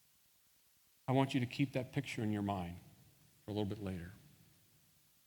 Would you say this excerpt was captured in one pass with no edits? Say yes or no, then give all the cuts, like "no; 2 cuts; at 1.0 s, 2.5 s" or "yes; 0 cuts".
yes; 0 cuts